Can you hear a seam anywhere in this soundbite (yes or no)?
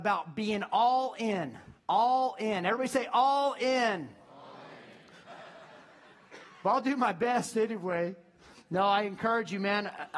yes